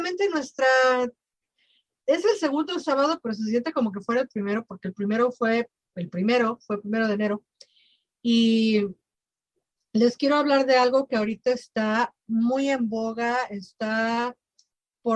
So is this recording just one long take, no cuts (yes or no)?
yes